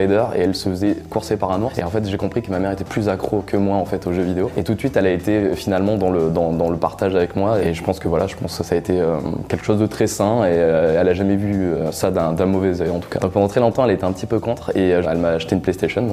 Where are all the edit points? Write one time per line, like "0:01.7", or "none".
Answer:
0:13.2
0:15.0